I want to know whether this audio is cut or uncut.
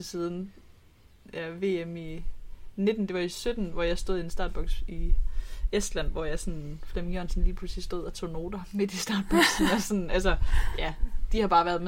uncut